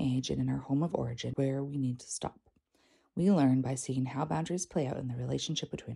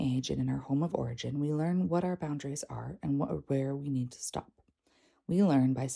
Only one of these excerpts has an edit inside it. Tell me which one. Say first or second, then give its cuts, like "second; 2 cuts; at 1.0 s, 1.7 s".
first; 1 cut; at 1.3 s